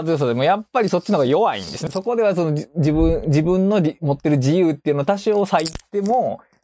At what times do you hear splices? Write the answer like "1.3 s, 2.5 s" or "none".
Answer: 1.9 s